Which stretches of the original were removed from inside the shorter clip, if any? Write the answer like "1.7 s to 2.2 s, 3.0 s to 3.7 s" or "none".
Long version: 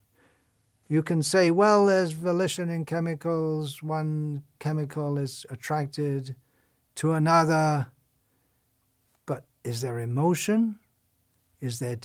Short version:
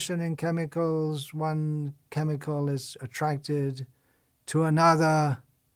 none